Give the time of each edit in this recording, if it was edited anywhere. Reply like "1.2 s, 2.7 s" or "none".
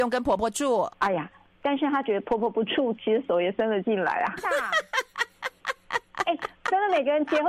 0.9 s, 4.4 s